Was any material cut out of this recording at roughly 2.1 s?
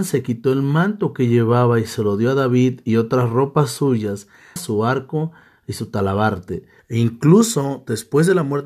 no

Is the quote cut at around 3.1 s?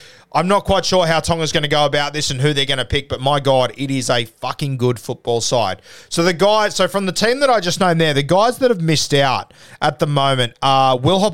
no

